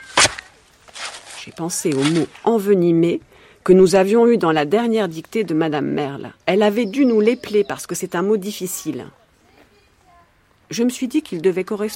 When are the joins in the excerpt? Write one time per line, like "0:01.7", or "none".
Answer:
0:06.4